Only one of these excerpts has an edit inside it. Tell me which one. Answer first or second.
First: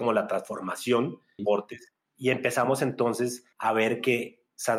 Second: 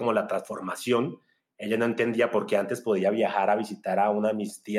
first